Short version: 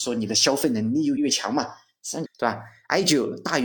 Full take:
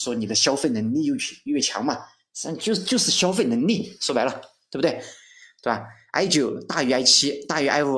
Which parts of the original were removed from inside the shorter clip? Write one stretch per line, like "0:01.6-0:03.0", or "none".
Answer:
0:01.2-0:01.5
0:02.6-0:05.5